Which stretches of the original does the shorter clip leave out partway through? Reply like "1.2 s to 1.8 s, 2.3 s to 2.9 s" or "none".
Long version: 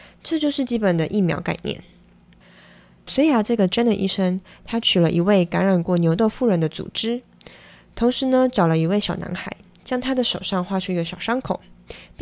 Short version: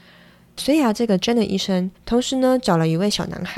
4.4 s to 7.8 s